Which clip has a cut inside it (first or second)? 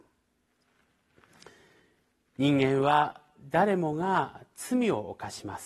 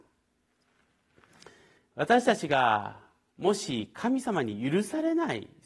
second